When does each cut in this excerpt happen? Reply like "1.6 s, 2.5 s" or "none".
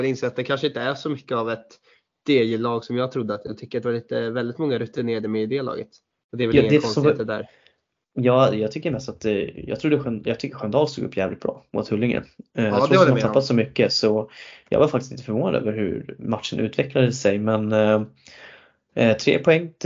6.1 s